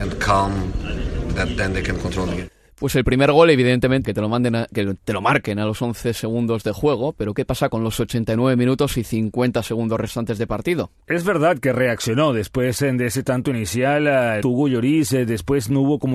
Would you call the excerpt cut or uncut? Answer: cut